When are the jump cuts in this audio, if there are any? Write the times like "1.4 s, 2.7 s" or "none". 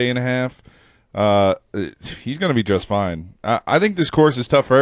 none

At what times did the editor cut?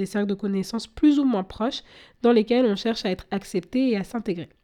none

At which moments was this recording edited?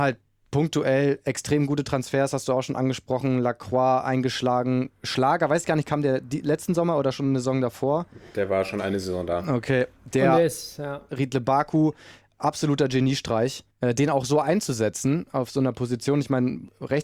11.1 s, 13.7 s

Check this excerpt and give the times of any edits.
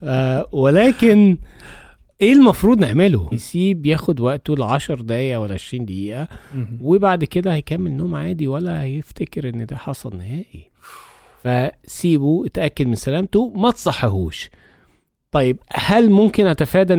3.3 s

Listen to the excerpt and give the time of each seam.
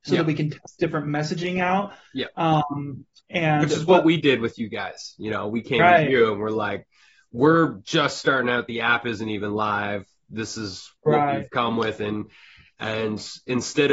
none

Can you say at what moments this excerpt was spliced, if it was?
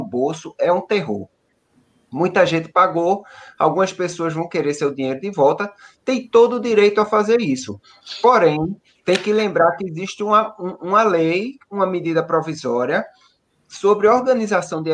none

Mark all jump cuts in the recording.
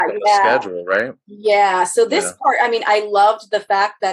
none

